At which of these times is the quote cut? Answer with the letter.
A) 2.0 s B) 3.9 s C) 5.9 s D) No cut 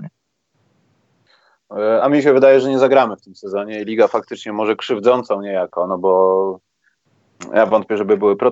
D